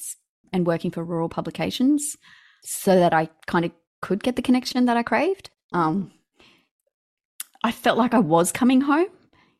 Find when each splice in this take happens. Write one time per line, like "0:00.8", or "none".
0:05.7